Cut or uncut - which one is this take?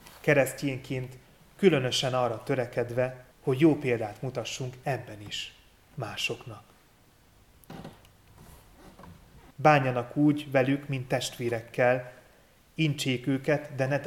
cut